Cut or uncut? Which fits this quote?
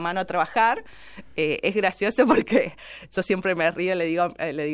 uncut